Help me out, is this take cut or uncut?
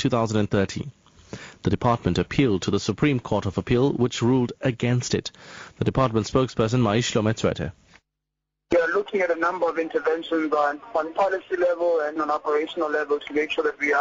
cut